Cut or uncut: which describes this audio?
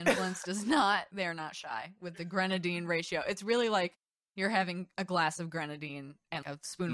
uncut